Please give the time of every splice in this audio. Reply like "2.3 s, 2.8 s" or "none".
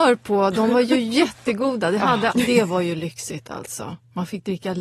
2.3 s